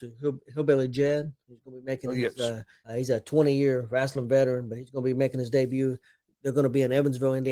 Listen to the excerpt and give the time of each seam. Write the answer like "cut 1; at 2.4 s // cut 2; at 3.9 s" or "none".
cut 1; at 2.8 s